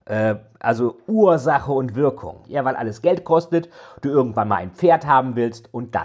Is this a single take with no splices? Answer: no; 1 cut; at 2.4 s

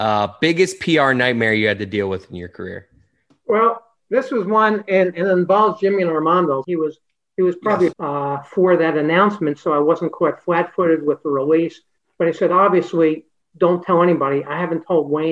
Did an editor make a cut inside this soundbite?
yes; 2 cuts; at 6.6 s, 7.9 s

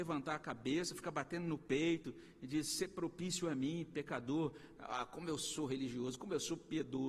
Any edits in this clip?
yes; 1 cut; at 4.8 s

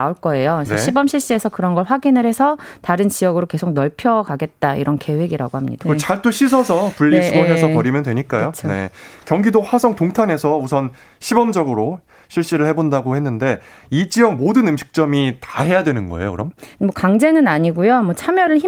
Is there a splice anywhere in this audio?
yes; 1 cut; at 5.8 s

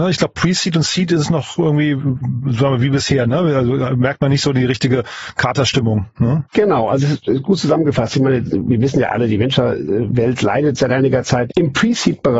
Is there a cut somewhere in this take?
yes; 1 cut; at 11.5 s

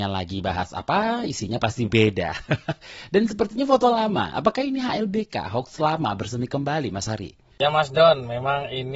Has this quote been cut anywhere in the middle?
no; 0 cuts

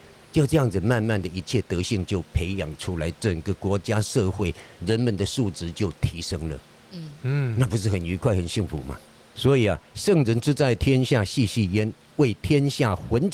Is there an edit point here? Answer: no; 0 cuts

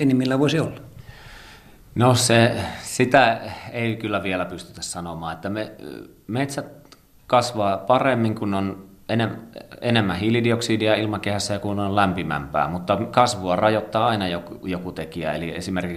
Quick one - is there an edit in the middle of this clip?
no; 0 cuts

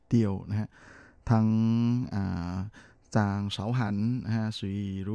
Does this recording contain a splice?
no; 0 cuts

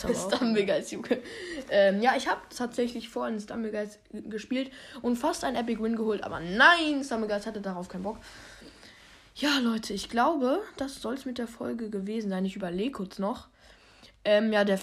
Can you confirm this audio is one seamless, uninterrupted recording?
yes; 0 cuts

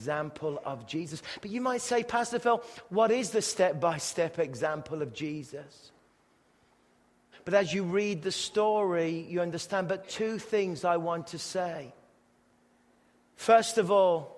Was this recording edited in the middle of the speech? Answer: yes; 1 cut; at 7.3 s

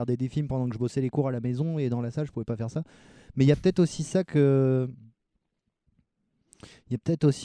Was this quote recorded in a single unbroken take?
yes; 0 cuts

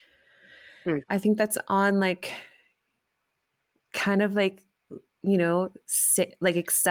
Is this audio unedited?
no; 1 cut; at 1.1 s

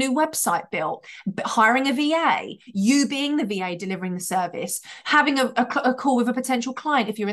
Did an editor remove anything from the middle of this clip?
no; 0 cuts

